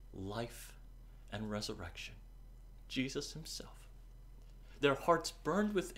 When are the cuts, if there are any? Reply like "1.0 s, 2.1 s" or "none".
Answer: 4.8 s